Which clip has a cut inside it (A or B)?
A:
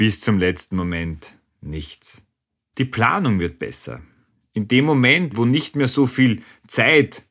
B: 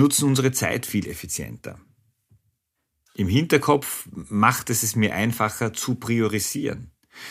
A